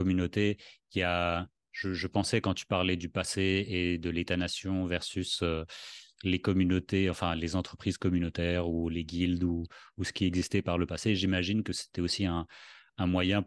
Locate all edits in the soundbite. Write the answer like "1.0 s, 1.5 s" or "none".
none